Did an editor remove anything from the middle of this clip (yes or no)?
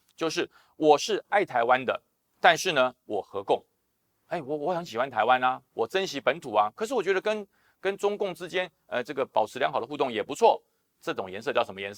no